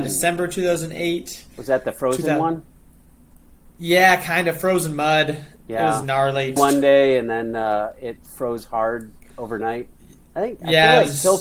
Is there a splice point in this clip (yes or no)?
yes